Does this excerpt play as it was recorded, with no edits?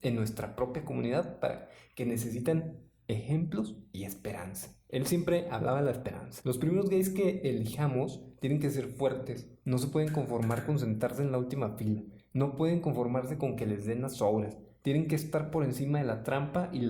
yes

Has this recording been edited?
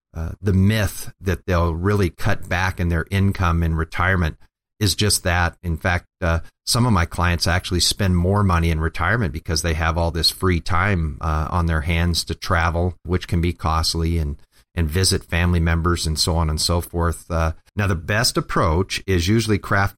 yes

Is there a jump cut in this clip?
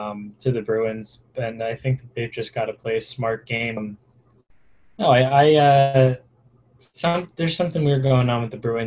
yes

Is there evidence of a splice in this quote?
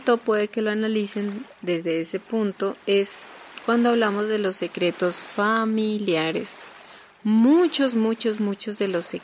no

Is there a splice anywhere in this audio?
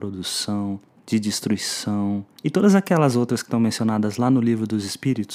yes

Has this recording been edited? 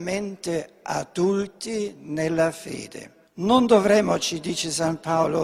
yes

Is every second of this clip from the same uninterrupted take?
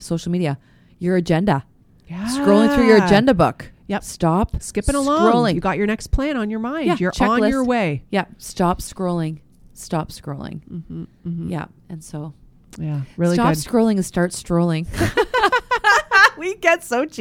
yes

